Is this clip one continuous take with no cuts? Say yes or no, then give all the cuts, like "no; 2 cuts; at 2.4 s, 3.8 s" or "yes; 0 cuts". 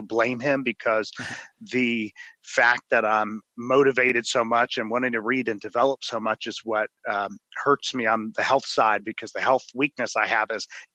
no; 1 cut; at 3.5 s